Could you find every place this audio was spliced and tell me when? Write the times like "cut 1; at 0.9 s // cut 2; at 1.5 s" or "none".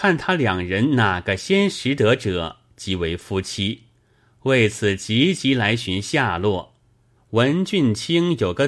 cut 1; at 7.2 s